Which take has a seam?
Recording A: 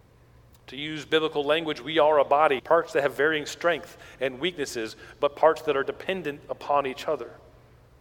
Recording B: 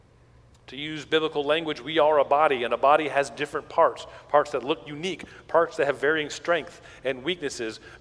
A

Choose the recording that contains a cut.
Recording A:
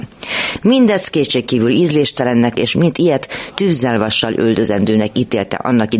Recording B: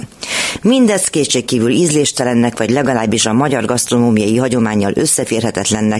A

